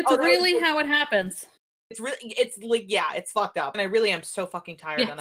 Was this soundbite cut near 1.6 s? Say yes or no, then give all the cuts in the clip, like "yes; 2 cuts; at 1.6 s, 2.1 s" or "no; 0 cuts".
no; 1 cut; at 3.7 s